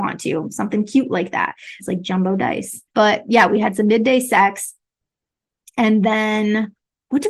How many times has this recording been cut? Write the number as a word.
two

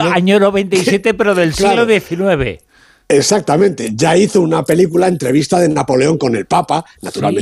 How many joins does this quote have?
zero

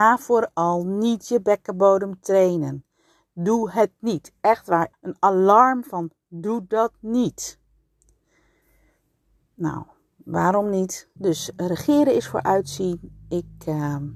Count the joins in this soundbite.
two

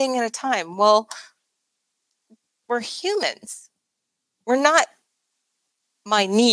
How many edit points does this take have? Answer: zero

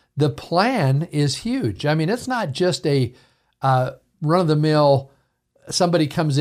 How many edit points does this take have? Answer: zero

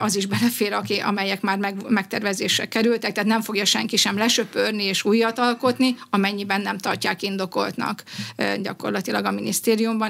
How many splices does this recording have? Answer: zero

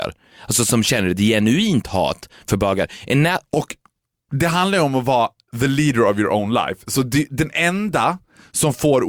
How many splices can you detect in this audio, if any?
one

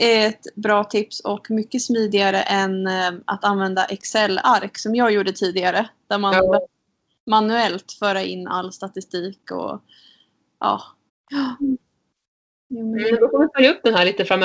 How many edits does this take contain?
one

